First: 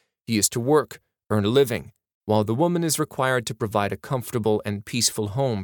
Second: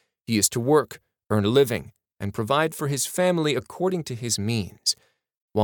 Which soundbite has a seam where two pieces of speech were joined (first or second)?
first